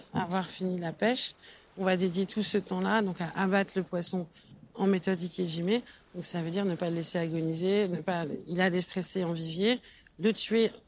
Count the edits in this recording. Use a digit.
0